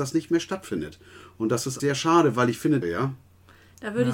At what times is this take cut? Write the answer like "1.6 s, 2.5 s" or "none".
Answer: 1.8 s, 2.8 s